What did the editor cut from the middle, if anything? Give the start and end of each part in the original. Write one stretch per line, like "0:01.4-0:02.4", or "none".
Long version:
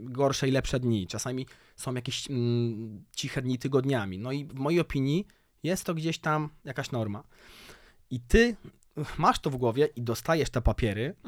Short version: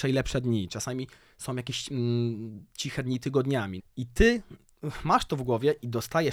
0:04.2-0:07.9